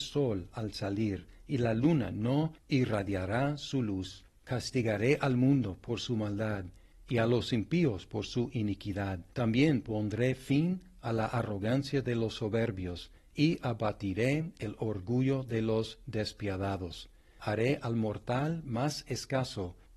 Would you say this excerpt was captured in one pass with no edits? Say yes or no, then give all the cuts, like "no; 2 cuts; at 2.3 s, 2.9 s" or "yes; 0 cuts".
no; 1 cut; at 9.3 s